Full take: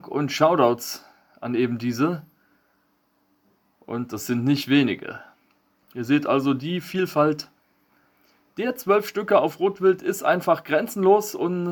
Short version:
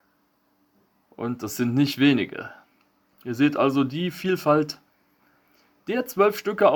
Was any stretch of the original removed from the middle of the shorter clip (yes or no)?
no